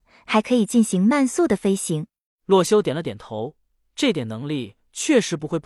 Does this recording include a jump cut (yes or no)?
yes